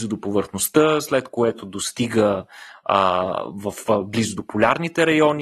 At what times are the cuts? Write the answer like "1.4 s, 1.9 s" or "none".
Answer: none